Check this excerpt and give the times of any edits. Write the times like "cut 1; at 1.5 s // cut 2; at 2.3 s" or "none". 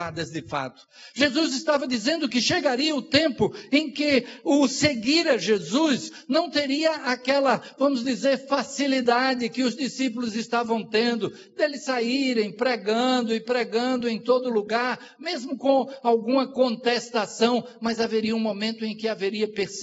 none